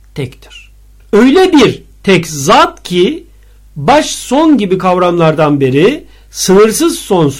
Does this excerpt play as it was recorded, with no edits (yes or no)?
no